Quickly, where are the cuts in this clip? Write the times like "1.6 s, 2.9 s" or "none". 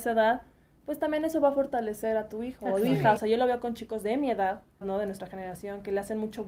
3.2 s, 4.8 s